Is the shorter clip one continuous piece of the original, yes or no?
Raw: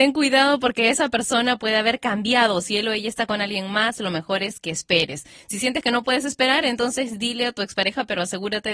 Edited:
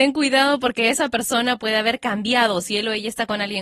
yes